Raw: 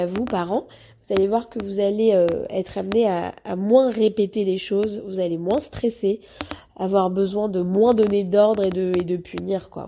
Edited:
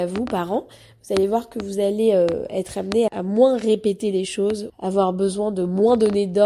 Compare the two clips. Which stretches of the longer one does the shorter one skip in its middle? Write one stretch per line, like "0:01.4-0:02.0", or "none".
0:03.1-0:03.4
0:05.0-0:06.7